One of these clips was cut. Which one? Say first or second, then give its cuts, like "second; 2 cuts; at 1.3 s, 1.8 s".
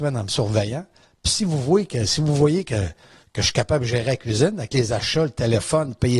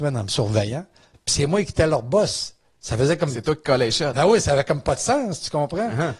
second; 1 cut; at 1.1 s